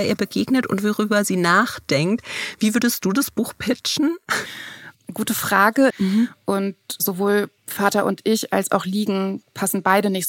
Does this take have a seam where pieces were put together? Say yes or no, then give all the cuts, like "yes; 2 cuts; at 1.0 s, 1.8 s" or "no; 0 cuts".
yes; 2 cuts; at 5.9 s, 7.6 s